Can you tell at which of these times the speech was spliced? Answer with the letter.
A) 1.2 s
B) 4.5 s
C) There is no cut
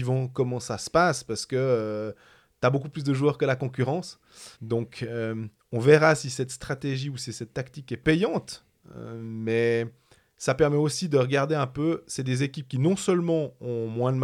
B